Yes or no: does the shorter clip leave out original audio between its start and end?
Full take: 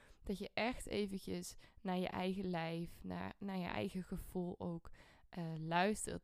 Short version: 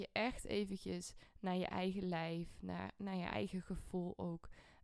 no